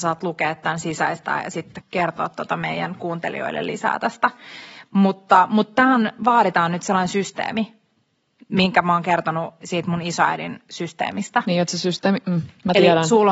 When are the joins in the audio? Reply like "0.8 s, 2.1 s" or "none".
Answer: 1.8 s

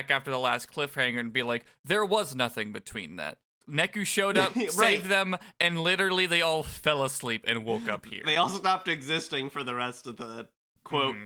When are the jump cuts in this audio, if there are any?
none

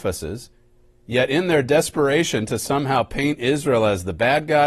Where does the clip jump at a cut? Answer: none

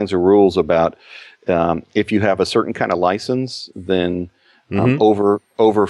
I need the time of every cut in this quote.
none

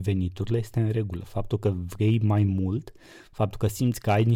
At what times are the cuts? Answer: none

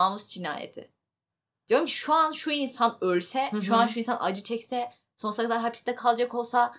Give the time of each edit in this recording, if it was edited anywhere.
none

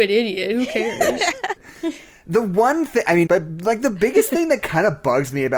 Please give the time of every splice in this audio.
1.6 s, 3.3 s

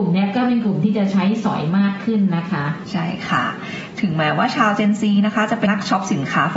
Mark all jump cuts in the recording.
5.7 s

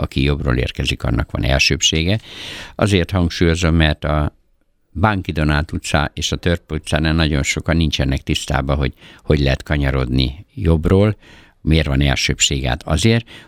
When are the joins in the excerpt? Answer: none

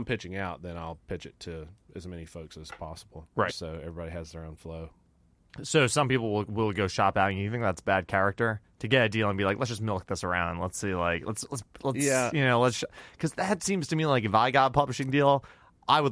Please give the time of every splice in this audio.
3.5 s

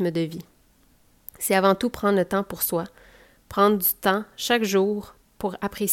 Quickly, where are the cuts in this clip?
none

